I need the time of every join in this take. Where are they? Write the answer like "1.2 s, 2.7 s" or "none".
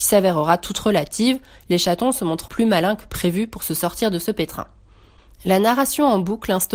2.5 s